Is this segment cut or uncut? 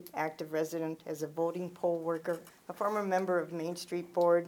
cut